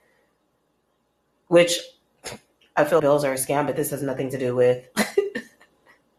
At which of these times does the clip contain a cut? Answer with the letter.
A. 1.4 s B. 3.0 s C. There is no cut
B